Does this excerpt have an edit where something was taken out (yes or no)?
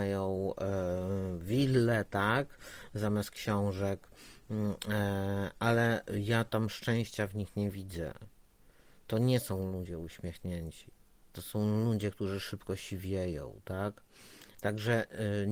yes